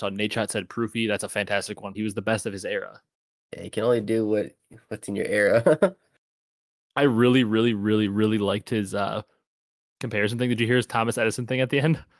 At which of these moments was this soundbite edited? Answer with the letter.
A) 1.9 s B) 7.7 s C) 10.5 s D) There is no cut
A